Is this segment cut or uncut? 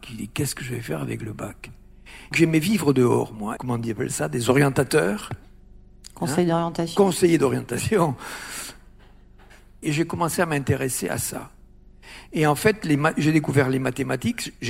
cut